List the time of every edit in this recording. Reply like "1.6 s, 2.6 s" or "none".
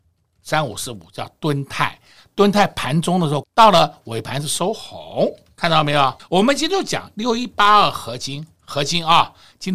3.4 s, 6.2 s